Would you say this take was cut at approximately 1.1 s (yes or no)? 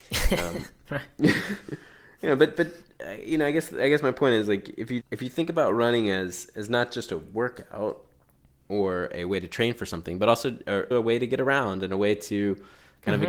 no